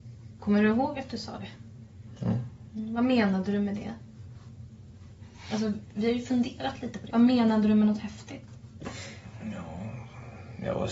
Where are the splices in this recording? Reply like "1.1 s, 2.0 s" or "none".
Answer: 7.1 s